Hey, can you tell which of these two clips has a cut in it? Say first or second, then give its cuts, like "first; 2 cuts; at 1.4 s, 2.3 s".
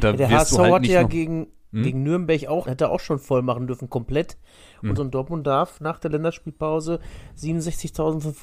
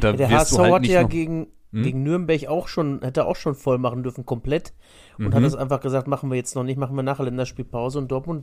first; 2 cuts; at 2.6 s, 5.0 s